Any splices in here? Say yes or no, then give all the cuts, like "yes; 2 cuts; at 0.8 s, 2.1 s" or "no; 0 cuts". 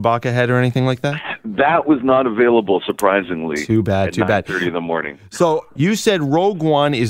yes; 1 cut; at 5.7 s